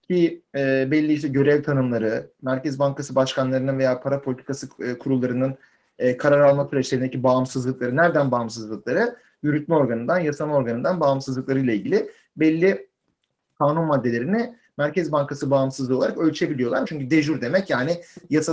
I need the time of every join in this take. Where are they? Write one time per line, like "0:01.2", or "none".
0:16.8

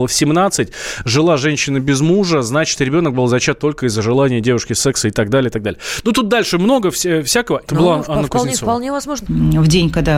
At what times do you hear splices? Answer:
0:07.7
0:09.3

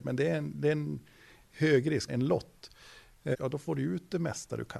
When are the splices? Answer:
0:02.1
0:03.3

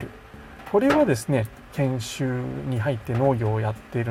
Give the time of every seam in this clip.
0:01.7

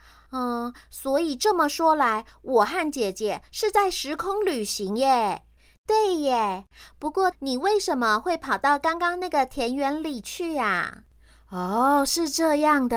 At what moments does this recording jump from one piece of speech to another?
0:07.3

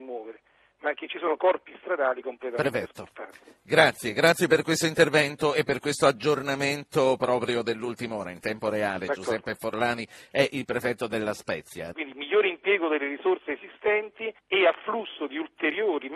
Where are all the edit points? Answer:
0:11.9
0:14.4

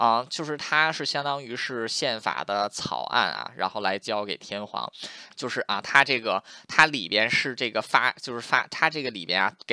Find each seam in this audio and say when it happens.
0:05.3

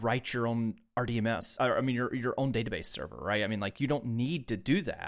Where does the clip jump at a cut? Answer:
none

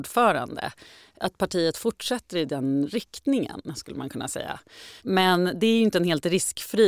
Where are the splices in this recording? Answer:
0:05.0

